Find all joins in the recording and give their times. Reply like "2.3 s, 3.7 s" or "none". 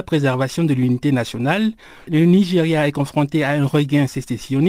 none